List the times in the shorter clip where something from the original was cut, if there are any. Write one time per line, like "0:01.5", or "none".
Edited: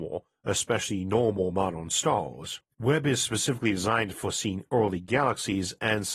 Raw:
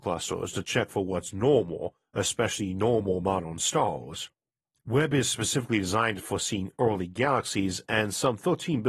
0:02.7